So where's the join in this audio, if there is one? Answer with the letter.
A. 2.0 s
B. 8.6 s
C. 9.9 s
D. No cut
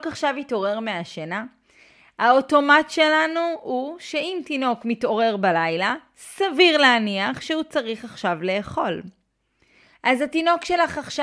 C